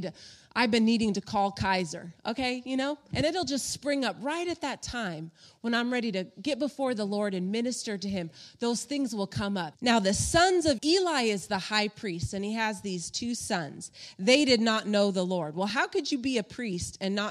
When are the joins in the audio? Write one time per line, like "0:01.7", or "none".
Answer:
0:03.1
0:09.7
0:10.8